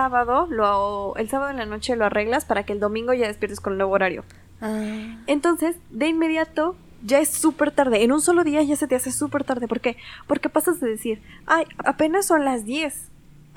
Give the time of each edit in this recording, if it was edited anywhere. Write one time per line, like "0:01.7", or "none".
0:11.8